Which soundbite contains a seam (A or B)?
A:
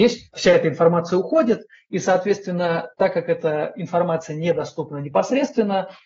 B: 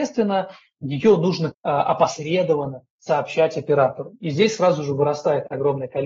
B